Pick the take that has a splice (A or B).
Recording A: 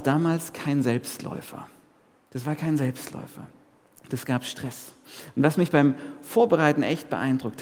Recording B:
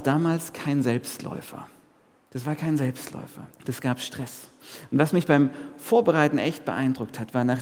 B